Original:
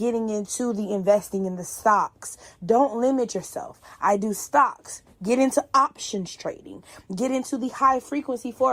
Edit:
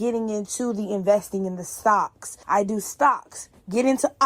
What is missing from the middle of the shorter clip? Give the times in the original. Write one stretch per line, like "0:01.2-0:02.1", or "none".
0:02.4-0:04.0